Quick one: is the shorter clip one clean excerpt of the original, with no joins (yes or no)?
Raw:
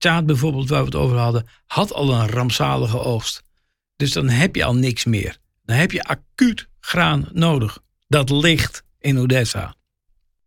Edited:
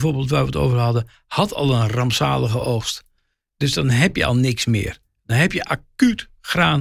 yes